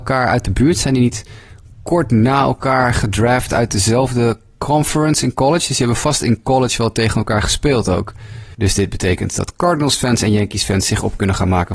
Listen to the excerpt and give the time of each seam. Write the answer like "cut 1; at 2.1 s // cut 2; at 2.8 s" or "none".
cut 1; at 8.5 s